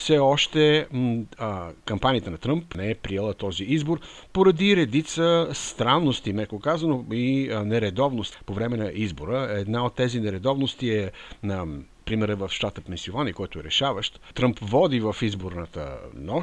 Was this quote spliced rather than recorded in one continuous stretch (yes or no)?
no